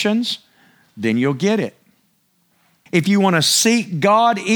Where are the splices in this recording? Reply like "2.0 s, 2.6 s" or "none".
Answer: 2.9 s